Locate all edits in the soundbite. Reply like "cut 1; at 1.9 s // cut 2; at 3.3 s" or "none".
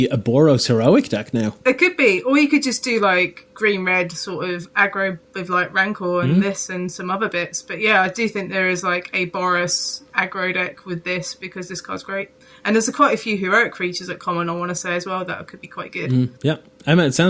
none